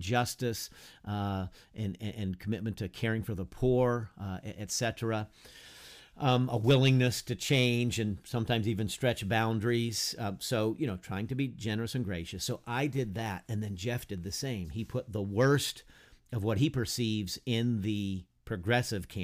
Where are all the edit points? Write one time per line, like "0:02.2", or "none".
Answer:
none

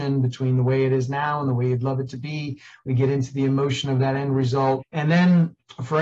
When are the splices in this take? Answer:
0:04.8

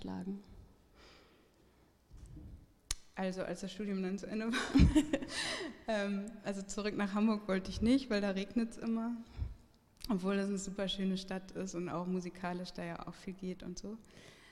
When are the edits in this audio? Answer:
none

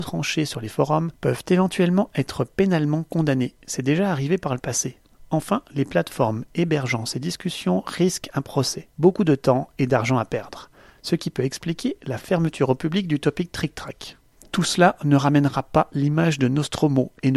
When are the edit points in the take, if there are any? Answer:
0:08.9

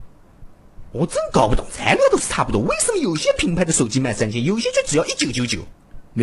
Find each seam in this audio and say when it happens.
none

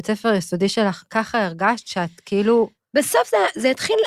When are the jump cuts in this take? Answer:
0:01.1

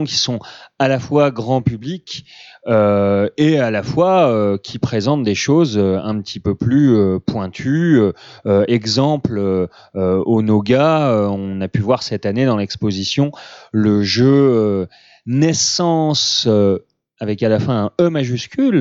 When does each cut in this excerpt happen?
none

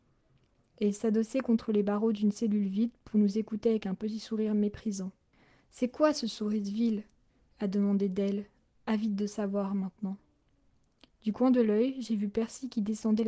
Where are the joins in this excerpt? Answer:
0:11.1

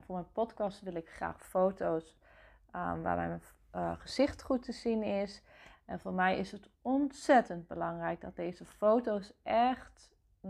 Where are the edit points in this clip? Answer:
0:05.7

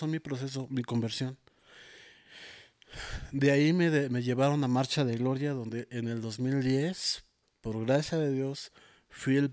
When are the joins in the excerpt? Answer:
none

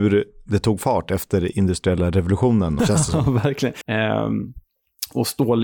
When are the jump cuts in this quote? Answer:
0:02.8
0:03.8

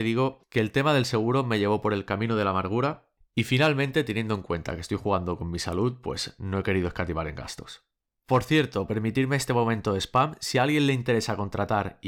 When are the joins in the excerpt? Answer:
none

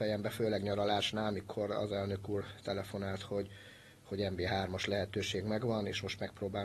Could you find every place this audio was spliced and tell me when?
none

